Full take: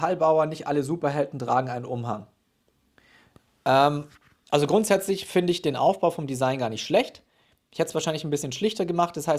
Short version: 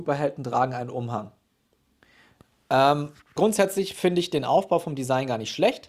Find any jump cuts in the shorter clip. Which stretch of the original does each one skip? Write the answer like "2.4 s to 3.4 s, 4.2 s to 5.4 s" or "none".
4.3 s to 4.7 s

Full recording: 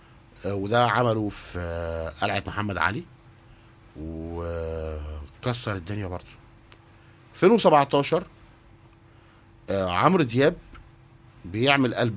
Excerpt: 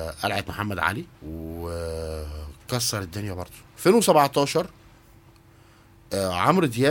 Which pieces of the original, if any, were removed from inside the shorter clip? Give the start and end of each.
3.1 s to 3.9 s, 6.4 s to 7.2 s

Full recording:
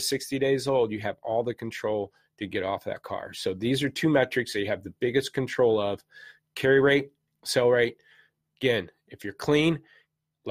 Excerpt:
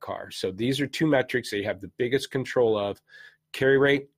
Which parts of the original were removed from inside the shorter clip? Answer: none

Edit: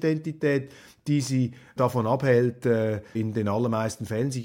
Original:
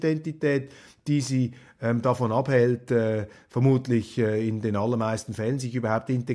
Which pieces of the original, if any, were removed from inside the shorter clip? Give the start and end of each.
1.8 s to 2.0 s, 3.4 s to 4.4 s

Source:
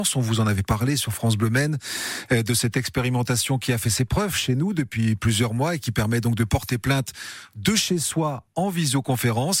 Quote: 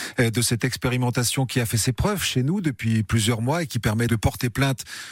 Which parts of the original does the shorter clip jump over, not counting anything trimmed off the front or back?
6.2 s to 6.4 s

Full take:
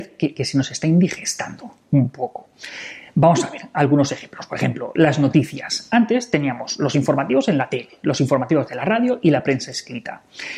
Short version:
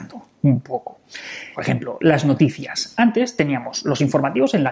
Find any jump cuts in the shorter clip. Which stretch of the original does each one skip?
3.0 s to 4.5 s

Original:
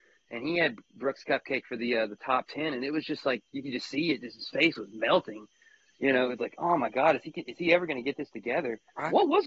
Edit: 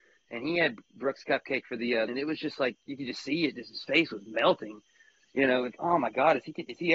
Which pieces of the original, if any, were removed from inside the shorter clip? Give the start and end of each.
2.1 s to 2.7 s, 6.4 s to 6.5 s

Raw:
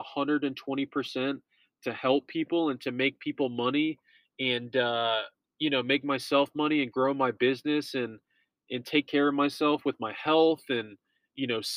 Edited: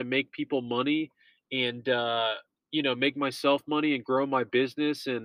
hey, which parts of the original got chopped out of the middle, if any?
none

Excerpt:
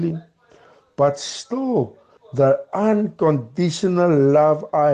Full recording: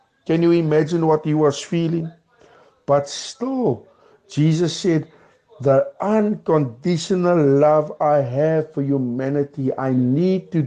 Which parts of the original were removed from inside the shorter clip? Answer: 4.1 s to 5.4 s

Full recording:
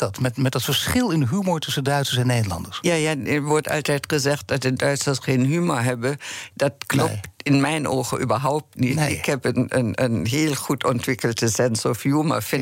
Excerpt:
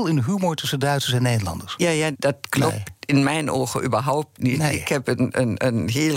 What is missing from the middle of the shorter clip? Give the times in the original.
3.2 s to 6.5 s

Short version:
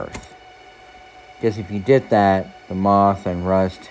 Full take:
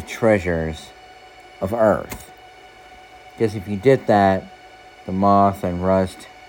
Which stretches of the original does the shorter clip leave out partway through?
4.6 s to 5.0 s

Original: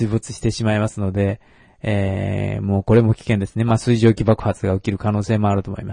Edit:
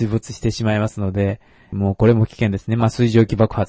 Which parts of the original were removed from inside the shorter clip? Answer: 1.7 s to 2.6 s

